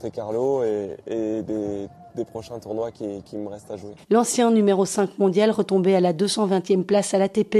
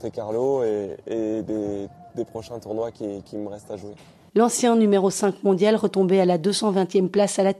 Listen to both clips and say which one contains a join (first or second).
first